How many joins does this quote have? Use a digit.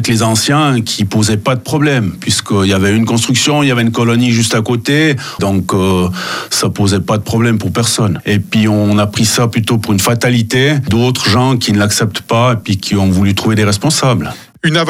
1